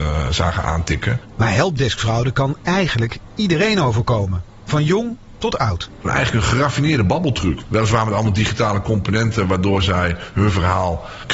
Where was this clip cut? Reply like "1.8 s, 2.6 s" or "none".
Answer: 6.0 s, 7.6 s

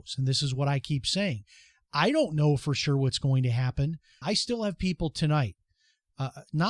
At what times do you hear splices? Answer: 4.2 s

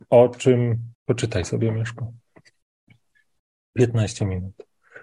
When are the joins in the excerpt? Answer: 0.9 s

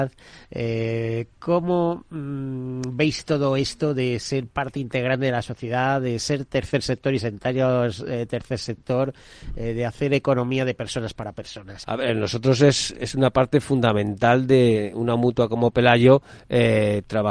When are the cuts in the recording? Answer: 11.8 s, 12.9 s

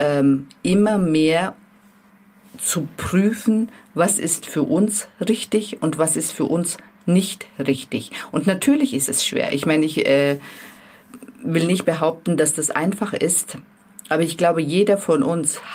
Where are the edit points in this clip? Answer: none

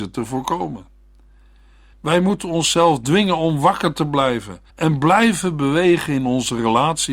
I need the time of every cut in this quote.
1.9 s, 4.7 s

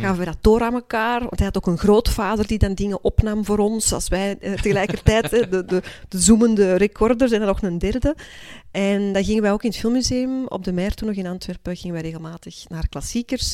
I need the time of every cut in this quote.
none

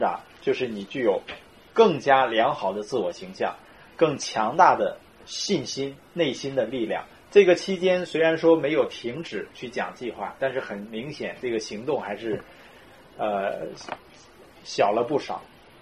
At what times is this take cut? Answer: 7.2 s

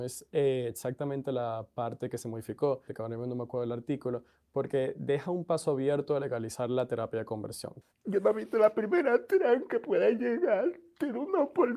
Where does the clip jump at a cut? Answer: 2.9 s, 7.9 s

